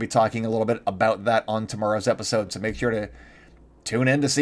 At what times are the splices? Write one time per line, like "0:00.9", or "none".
none